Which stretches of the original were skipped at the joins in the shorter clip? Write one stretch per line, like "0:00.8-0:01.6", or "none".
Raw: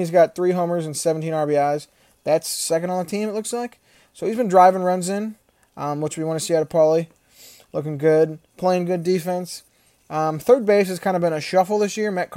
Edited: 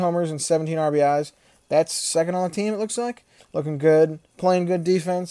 0:03.9-0:07.6